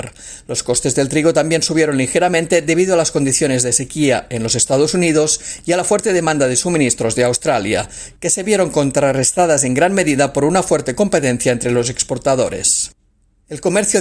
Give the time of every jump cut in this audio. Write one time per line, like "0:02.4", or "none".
none